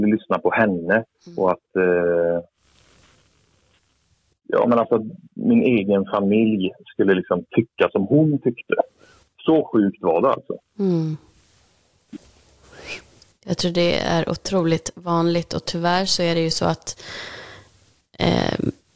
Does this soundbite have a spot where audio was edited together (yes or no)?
no